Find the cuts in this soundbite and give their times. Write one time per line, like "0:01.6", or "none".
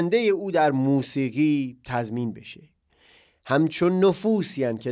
none